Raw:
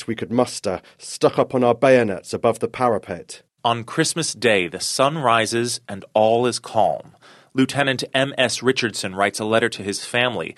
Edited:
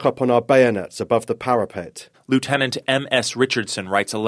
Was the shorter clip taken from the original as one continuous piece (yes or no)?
no